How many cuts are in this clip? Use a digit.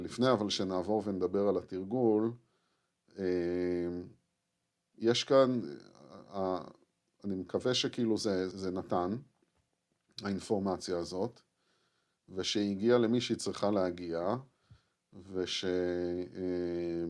1